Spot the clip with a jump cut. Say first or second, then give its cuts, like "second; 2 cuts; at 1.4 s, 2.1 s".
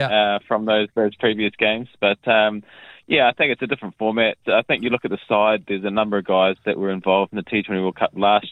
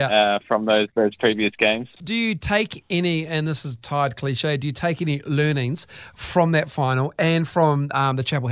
second; 1 cut; at 2.0 s